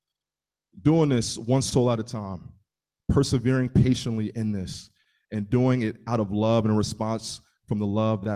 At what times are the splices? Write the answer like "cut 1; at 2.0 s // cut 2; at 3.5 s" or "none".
none